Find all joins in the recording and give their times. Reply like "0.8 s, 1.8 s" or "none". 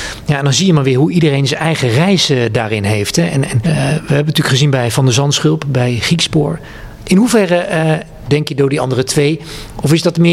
3.6 s, 7.0 s, 8.3 s

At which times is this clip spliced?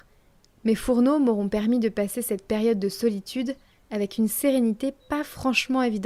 none

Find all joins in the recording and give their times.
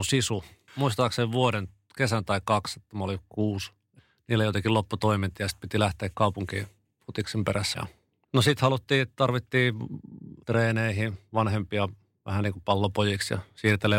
7.7 s

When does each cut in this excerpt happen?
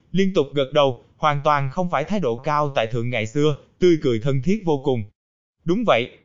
2.4 s

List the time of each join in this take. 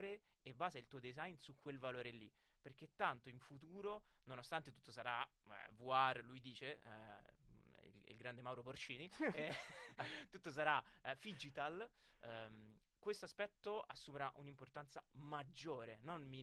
none

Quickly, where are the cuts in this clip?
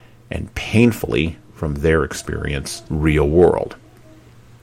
2.8 s

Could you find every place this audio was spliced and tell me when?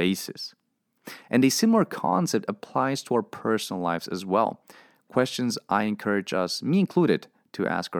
none

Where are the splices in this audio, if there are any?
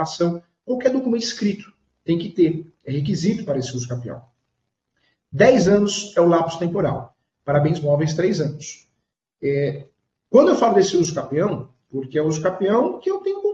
11.9 s

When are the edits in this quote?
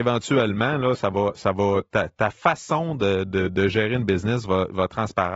none

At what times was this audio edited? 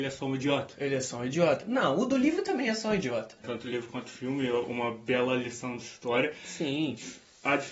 3.4 s

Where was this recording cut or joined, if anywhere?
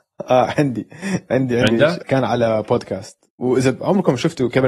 2.0 s

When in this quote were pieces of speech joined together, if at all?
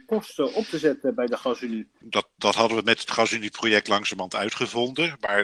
2.0 s

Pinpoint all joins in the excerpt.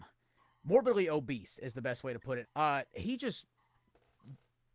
2.4 s

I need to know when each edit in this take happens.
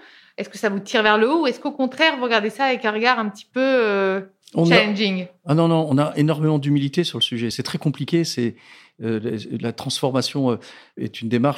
none

